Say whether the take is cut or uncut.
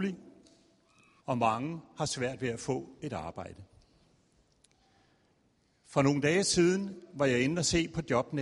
cut